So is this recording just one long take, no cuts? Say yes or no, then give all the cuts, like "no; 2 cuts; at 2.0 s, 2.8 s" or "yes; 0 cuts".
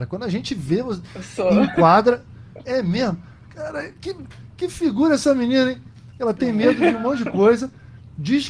yes; 0 cuts